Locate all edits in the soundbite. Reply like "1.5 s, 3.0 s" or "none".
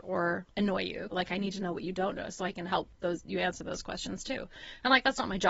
1.1 s